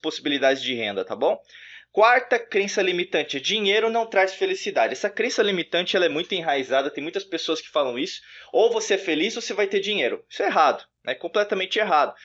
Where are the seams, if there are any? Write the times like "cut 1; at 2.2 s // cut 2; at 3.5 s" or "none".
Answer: none